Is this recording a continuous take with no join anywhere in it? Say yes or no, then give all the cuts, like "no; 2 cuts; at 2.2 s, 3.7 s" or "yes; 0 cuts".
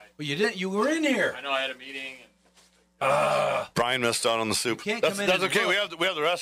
yes; 0 cuts